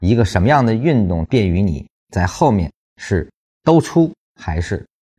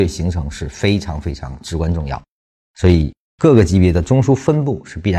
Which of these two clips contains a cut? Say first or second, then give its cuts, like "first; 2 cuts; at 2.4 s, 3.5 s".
first; 1 cut; at 1.2 s